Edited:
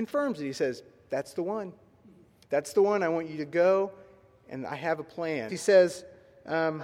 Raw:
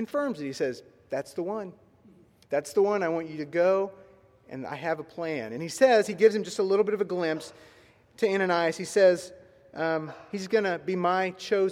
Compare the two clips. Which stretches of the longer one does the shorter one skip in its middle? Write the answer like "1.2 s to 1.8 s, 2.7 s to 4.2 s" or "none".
5.5 s to 8.8 s